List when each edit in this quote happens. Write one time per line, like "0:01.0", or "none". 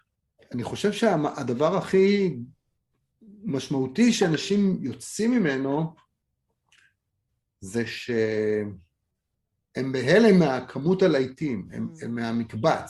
none